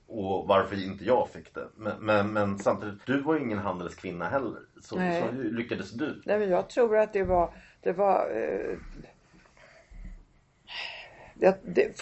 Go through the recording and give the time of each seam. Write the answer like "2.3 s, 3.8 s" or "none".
3.0 s